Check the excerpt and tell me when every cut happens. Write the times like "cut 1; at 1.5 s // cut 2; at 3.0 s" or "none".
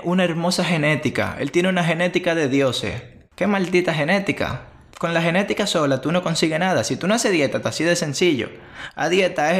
cut 1; at 7.6 s